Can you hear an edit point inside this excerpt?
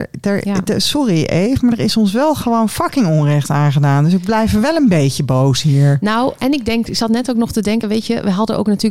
no; 0 cuts

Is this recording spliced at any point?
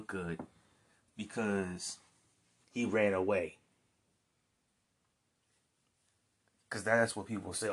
no; 0 cuts

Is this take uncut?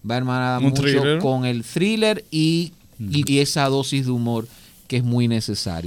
no; 1 cut; at 3.3 s

